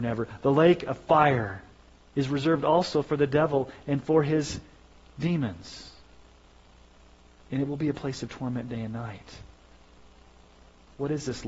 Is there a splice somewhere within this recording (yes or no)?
no